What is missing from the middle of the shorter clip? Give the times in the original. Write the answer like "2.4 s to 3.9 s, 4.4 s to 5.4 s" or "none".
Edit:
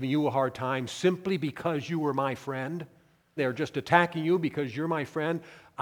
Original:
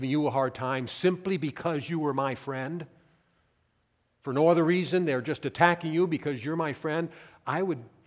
3.4 s to 5.1 s